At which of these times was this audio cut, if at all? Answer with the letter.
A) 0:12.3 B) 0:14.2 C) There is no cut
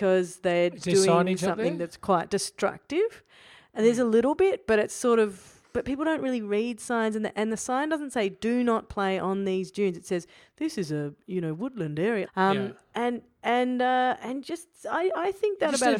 A